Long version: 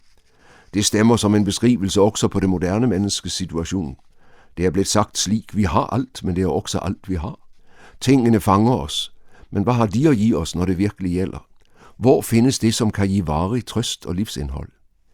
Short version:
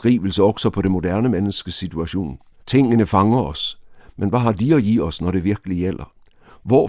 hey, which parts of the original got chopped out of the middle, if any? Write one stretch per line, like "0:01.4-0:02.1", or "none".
0:04.2-0:07.9